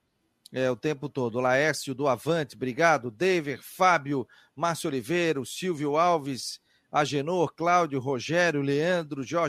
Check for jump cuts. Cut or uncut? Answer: uncut